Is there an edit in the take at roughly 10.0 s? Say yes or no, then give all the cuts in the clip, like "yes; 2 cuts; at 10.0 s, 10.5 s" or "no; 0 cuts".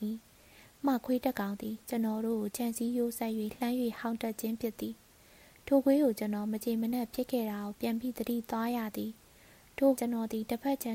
yes; 1 cut; at 10.0 s